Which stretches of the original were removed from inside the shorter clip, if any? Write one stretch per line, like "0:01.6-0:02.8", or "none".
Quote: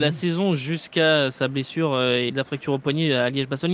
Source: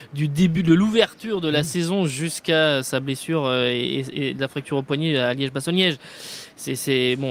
0:03.8-0:04.3